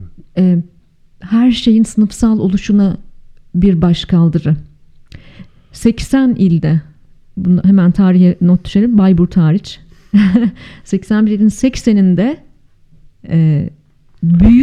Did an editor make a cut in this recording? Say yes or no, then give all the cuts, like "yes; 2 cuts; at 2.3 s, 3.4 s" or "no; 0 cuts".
no; 0 cuts